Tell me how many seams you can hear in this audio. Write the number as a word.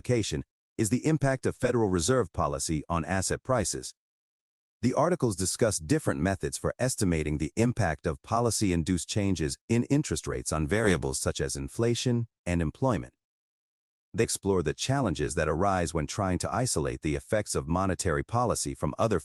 three